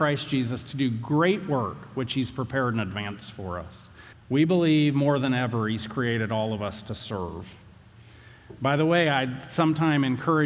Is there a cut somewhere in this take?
yes; 1 cut; at 4.1 s

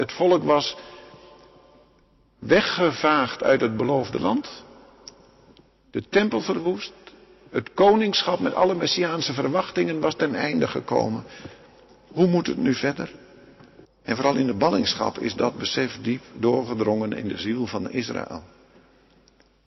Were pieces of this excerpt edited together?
yes; 1 cut; at 13.8 s

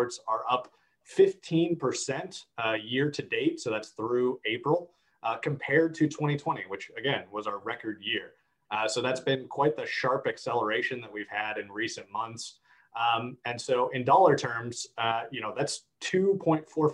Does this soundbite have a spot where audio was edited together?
no; 0 cuts

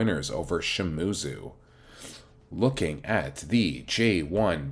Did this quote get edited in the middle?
no; 0 cuts

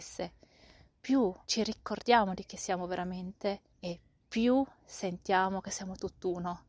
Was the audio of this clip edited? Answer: yes; 2 cuts; at 1.4 s, 3.7 s

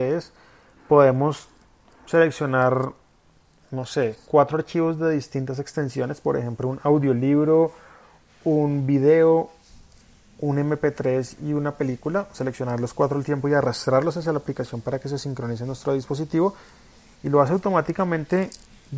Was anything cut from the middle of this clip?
no; 0 cuts

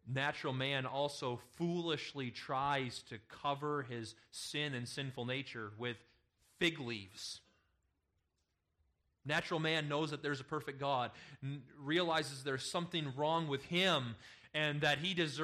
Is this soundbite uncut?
yes; 0 cuts

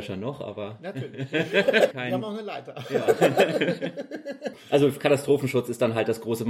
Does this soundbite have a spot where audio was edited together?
yes; 2 cuts; at 1.9 s, 4.5 s

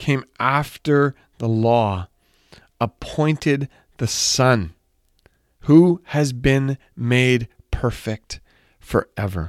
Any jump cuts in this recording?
no; 0 cuts

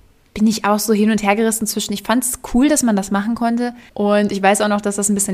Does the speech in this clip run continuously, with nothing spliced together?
no; 1 cut; at 3.9 s

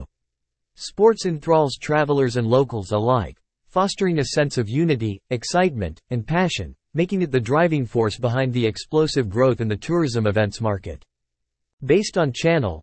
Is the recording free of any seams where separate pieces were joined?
yes; 0 cuts

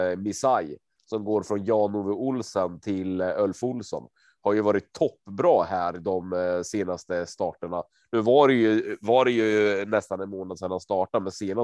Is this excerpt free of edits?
yes; 0 cuts

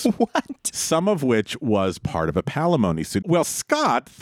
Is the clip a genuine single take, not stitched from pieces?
no; 1 cut; at 3.2 s

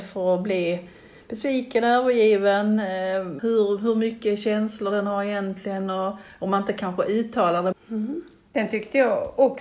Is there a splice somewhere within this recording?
yes; 2 cuts; at 3.4 s, 7.7 s

